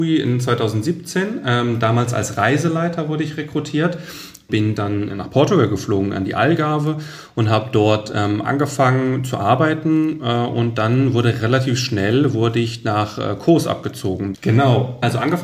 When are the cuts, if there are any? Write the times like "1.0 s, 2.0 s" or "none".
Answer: 5.1 s, 14.3 s